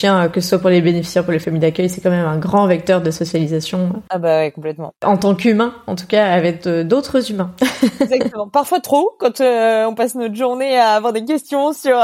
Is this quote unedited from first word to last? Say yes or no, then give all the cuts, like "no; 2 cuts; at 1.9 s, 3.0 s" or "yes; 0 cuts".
yes; 0 cuts